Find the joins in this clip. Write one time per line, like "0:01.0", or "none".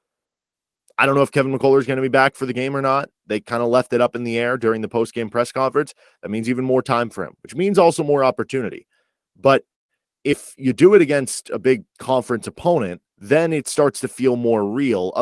0:11.9
0:13.1